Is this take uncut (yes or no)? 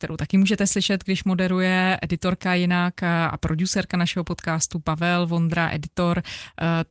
yes